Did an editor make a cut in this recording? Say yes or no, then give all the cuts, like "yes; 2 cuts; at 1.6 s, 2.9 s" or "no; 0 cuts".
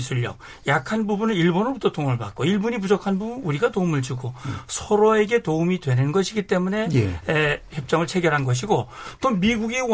yes; 1 cut; at 7.7 s